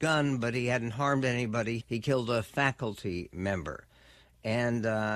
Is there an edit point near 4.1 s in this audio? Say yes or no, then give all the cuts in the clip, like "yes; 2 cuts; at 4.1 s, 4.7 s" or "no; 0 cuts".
no; 1 cut; at 1.8 s